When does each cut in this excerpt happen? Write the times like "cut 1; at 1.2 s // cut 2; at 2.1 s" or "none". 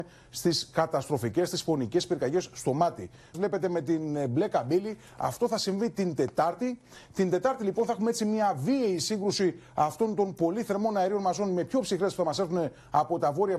cut 1; at 3.3 s